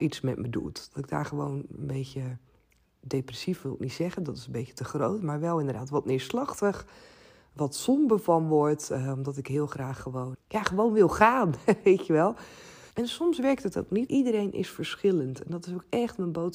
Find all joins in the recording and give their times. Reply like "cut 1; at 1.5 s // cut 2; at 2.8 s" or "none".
cut 1; at 10.3 s // cut 2; at 12.9 s // cut 3; at 14.1 s